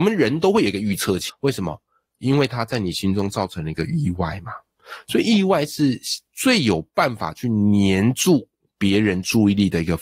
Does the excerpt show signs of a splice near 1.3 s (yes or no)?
yes